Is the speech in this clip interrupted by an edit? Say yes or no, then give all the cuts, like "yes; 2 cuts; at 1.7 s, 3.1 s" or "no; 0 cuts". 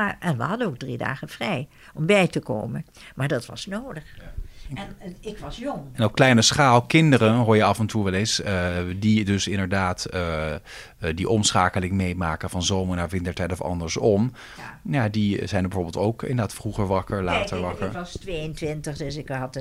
no; 0 cuts